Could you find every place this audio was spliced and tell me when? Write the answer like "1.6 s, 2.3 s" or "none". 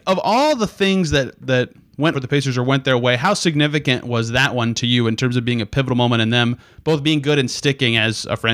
2.1 s